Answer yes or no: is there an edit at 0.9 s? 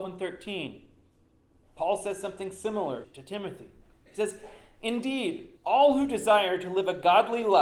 no